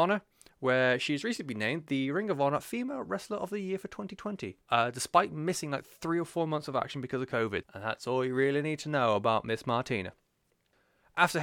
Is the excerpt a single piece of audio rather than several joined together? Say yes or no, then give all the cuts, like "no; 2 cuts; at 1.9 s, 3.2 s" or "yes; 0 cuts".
no; 2 cuts; at 4.6 s, 7.6 s